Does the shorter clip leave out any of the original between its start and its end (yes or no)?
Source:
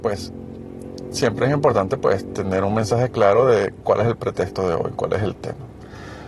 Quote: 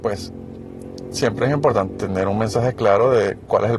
yes